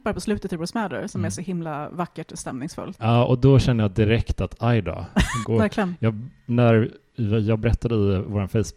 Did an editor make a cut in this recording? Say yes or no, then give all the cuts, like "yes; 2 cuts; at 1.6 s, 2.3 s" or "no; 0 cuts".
yes; 2 cuts; at 3.0 s, 5.4 s